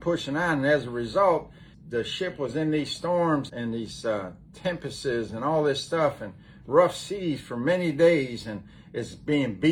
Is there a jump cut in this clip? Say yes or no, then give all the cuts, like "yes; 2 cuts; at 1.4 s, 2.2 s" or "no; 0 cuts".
yes; 2 cuts; at 1.7 s, 3.5 s